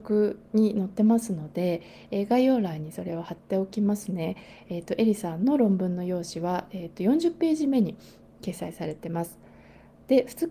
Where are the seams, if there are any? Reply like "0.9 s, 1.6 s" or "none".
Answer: none